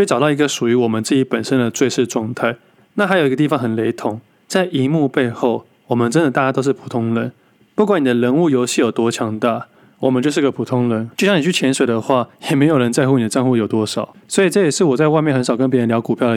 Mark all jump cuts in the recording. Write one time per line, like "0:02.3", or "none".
0:11.1